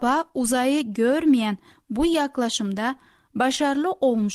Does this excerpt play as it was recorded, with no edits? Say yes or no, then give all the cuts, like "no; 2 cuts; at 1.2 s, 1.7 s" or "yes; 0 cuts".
yes; 0 cuts